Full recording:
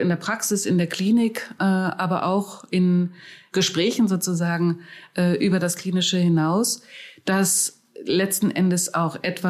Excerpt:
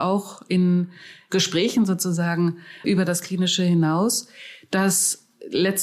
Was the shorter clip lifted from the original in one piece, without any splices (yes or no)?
no